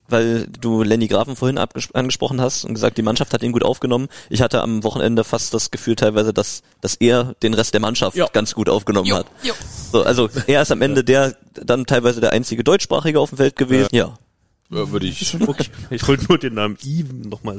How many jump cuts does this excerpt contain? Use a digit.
2